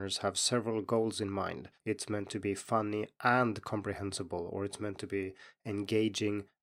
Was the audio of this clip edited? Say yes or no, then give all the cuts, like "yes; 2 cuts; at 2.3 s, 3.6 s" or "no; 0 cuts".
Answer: yes; 1 cut; at 1.8 s